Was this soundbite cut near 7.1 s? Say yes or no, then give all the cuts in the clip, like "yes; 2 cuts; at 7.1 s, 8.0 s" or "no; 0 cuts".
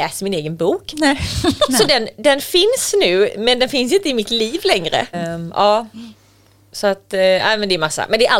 no; 1 cut; at 5.1 s